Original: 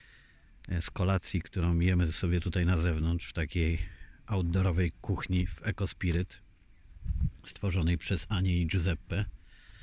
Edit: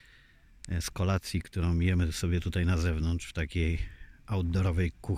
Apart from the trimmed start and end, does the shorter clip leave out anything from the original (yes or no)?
no